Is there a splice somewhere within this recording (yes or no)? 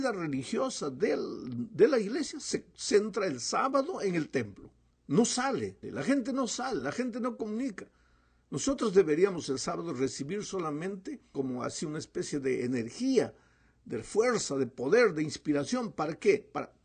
yes